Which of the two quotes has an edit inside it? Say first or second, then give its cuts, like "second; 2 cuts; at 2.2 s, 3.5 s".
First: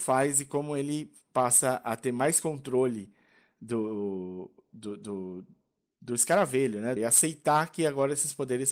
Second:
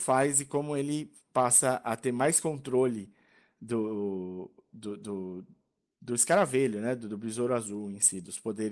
first; 1 cut; at 7.0 s